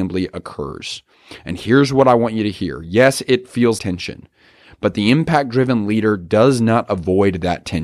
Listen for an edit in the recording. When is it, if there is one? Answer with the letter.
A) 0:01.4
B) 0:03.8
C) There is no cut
B